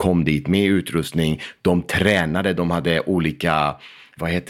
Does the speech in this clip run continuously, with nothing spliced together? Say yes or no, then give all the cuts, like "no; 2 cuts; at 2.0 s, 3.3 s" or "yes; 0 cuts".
yes; 0 cuts